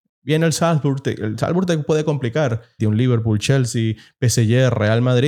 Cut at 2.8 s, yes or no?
yes